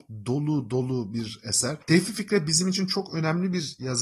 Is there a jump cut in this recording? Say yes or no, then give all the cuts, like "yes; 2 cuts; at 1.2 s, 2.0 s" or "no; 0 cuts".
no; 0 cuts